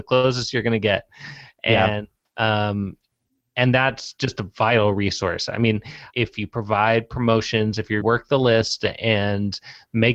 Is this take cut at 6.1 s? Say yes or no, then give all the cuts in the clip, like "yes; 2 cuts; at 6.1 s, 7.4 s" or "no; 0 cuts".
yes; 2 cuts; at 6.1 s, 8.0 s